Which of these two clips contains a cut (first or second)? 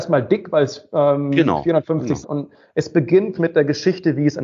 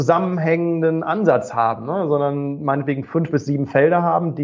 first